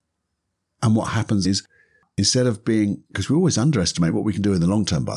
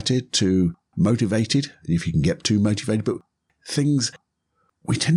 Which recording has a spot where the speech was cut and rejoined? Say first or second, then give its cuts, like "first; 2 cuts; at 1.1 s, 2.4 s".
first; 2 cuts; at 1.4 s, 3.1 s